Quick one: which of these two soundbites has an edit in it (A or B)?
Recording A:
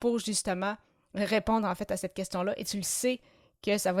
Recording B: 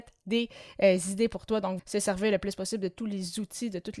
B